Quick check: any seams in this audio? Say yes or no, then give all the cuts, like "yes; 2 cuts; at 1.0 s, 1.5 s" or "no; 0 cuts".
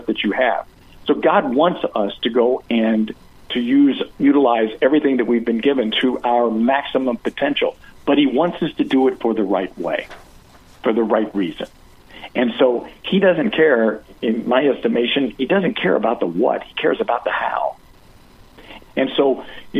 yes; 1 cut; at 18.8 s